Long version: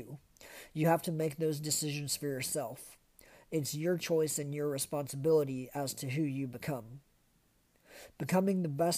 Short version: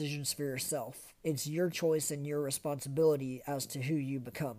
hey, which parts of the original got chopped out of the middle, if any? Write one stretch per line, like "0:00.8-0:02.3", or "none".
0:03.0-0:03.4